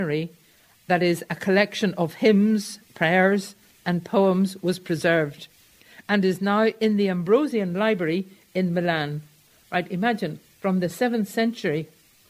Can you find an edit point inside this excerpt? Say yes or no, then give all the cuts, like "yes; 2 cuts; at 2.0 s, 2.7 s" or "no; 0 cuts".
no; 0 cuts